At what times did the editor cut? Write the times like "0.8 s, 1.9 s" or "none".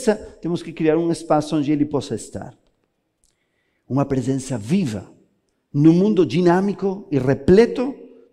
5.5 s